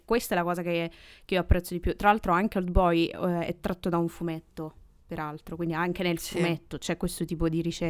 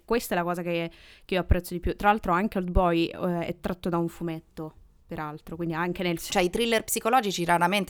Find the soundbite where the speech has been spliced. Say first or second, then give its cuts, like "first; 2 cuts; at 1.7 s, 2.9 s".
second; 1 cut; at 6.3 s